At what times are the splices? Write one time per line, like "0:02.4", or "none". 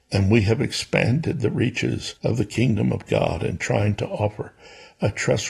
0:02.2

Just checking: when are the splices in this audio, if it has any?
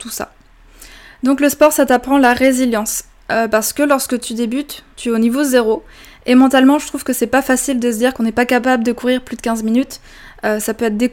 none

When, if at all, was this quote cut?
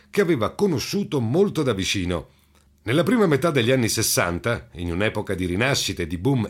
0:02.7

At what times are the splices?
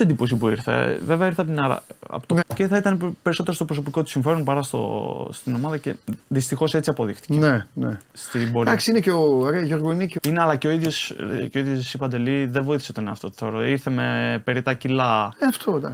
0:02.4
0:10.2

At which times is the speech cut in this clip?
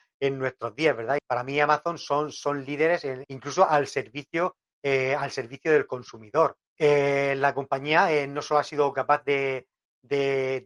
0:01.2
0:03.2
0:06.7

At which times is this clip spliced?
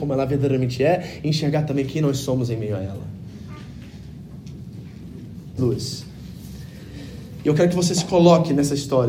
0:05.6

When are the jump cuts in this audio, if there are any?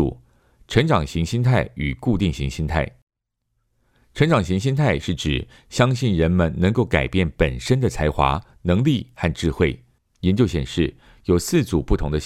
0:10.0

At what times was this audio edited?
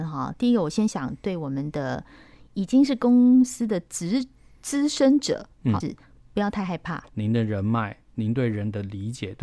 0:05.8
0:07.1

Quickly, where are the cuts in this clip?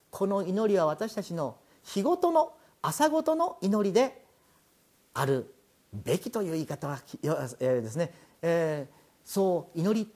0:08.3

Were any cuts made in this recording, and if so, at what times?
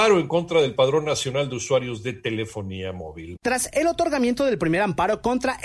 0:03.4

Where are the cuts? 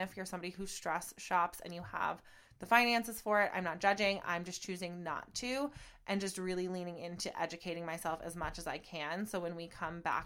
none

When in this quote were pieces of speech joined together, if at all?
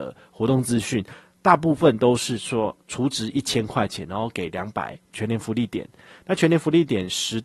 0:05.1

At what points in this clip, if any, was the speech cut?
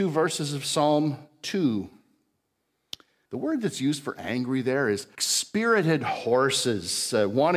0:03.3
0:05.2

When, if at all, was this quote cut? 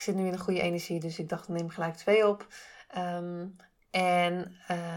none

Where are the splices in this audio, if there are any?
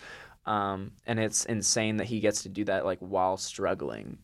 0:01.0

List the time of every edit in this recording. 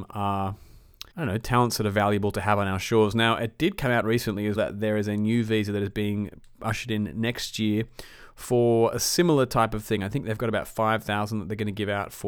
0:01.1
0:04.5

